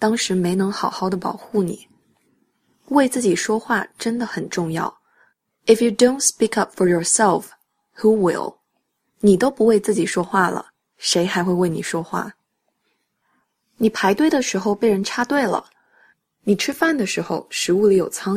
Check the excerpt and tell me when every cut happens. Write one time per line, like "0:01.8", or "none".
none